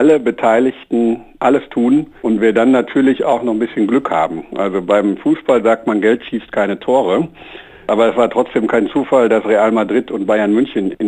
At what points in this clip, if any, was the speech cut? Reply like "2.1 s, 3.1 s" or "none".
2.2 s